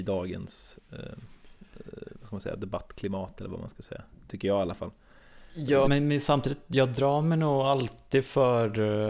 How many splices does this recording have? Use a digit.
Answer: 1